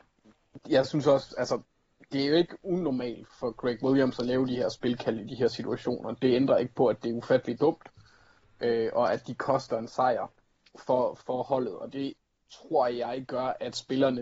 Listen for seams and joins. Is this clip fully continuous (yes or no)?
yes